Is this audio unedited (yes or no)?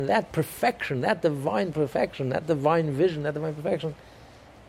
yes